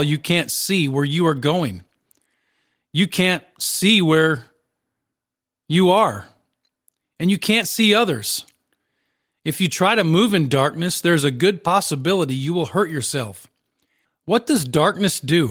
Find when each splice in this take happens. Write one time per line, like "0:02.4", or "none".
0:14.0